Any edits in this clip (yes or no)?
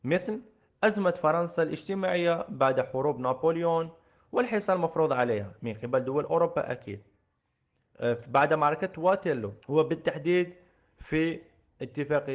yes